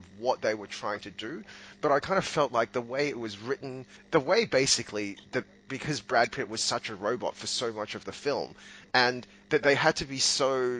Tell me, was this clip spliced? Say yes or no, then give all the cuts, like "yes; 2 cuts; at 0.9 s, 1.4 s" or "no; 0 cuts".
yes; 1 cut; at 4.0 s